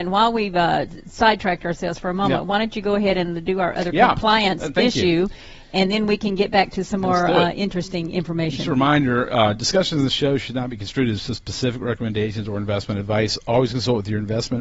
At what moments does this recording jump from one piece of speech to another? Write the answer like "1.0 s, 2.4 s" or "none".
none